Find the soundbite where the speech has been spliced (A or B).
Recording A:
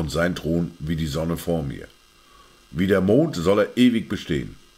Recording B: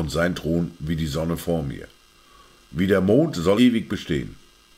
B